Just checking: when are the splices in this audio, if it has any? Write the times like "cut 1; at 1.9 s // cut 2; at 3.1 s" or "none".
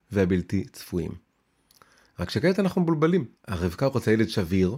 cut 1; at 3.4 s